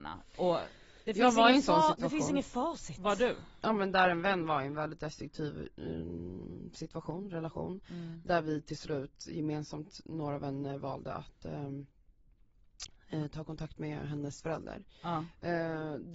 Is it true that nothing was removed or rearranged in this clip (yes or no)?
yes